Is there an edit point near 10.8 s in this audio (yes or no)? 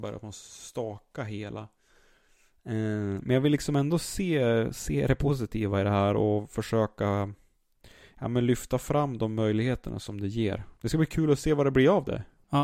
yes